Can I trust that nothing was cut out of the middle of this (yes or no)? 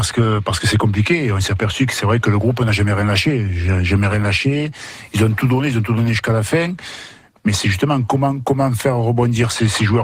yes